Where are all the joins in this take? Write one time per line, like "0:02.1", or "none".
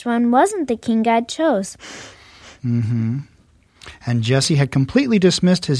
none